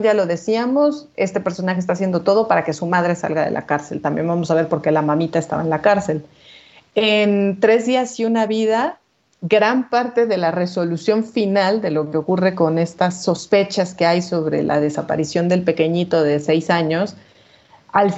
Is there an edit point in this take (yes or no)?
no